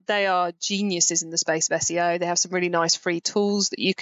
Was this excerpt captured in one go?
yes; 0 cuts

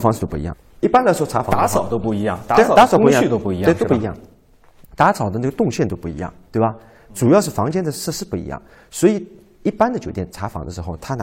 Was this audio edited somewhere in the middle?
no; 0 cuts

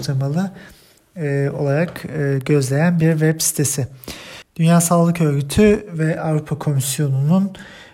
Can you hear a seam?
yes; 1 cut; at 4.5 s

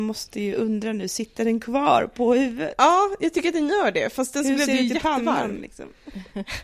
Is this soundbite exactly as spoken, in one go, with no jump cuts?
yes; 0 cuts

